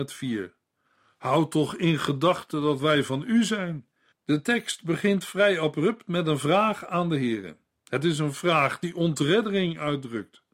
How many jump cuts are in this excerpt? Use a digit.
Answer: 1